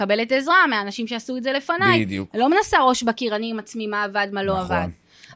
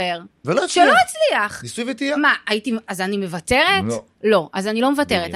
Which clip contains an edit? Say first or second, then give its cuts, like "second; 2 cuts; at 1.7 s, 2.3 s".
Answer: second; 1 cut; at 2.9 s